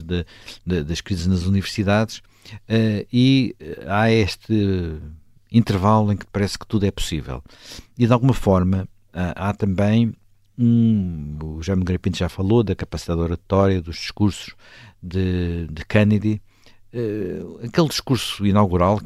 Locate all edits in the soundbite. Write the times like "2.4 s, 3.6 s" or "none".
none